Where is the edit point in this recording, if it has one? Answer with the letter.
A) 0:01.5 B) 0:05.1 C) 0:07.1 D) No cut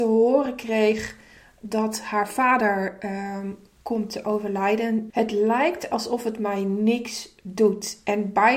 B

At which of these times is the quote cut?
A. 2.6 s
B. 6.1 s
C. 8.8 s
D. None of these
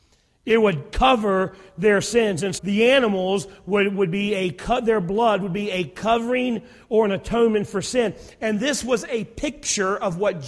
A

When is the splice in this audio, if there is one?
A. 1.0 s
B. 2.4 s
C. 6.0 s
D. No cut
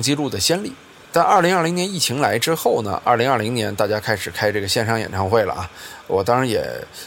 D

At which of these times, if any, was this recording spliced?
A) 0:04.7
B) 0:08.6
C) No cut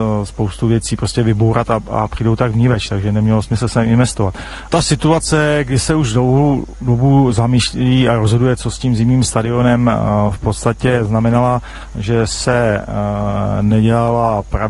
A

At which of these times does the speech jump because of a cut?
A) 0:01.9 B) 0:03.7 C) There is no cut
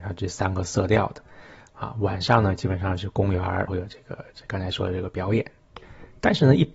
B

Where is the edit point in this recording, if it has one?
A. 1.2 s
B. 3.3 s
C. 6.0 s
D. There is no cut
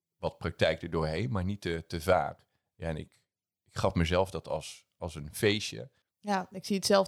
C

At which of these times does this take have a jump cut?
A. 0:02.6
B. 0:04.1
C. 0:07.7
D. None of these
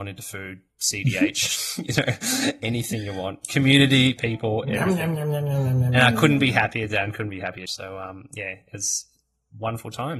C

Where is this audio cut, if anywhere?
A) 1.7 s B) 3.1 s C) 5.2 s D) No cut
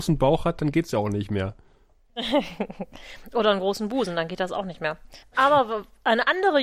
C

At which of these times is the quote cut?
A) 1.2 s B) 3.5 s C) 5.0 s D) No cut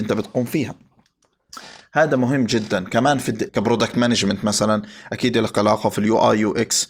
B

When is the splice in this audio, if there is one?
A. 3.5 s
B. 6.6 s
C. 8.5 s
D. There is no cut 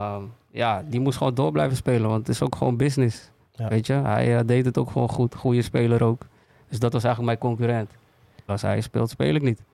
C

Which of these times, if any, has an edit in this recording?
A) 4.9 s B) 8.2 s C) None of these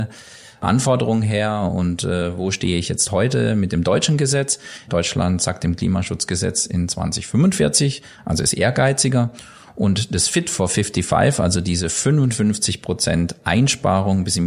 A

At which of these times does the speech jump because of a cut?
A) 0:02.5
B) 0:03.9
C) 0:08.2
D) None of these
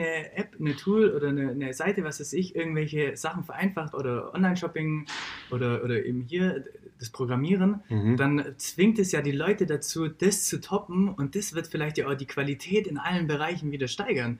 B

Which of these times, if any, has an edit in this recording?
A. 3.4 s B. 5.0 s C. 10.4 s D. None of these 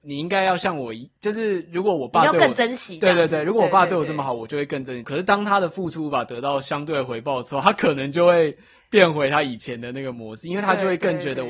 B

